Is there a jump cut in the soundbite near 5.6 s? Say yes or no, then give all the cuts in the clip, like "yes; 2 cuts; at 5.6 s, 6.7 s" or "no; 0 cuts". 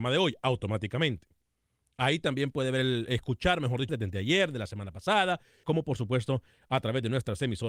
yes; 2 cuts; at 3.9 s, 5.6 s